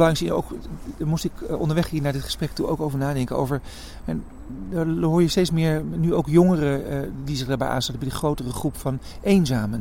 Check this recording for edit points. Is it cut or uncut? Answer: uncut